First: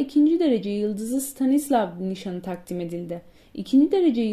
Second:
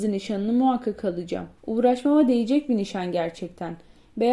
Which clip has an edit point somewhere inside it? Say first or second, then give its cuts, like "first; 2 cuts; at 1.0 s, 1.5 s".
second; 1 cut; at 1.6 s